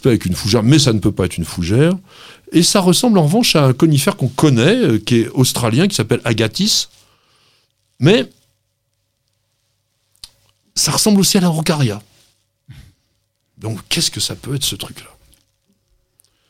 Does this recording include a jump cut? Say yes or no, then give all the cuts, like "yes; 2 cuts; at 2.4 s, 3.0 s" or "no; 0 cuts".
no; 0 cuts